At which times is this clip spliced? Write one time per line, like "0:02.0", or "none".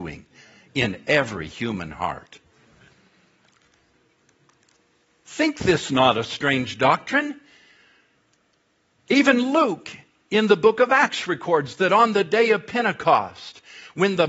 none